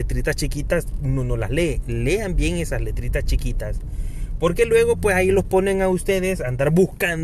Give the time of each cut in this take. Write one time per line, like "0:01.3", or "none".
none